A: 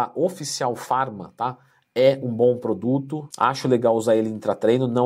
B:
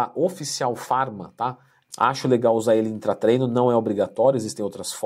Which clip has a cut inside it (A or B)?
B